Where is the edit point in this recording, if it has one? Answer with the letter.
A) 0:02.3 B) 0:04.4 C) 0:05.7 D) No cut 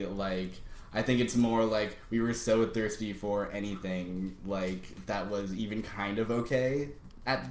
D